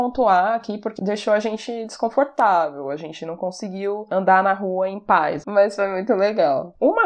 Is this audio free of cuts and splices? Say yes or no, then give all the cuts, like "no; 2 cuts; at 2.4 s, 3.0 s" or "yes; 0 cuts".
no; 1 cut; at 5.4 s